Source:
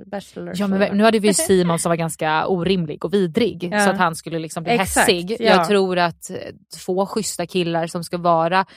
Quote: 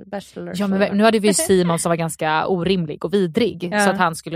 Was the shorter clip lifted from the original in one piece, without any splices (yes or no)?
yes